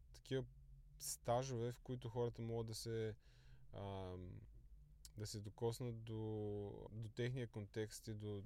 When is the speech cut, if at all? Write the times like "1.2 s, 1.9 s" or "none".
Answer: 6.9 s